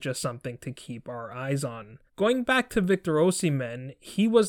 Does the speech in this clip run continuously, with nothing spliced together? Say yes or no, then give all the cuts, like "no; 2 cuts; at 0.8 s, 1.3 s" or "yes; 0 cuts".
no; 1 cut; at 2.1 s